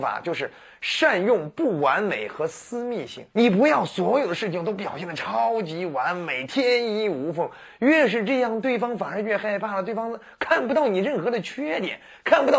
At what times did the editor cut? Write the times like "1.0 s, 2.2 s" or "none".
3.3 s